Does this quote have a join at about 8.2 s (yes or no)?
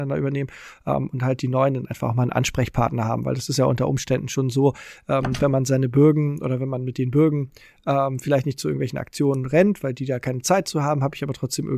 no